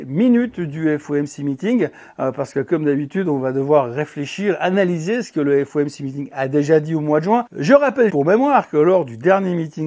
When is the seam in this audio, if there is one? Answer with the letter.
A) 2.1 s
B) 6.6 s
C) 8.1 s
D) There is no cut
C